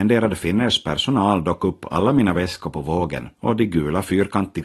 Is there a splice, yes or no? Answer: yes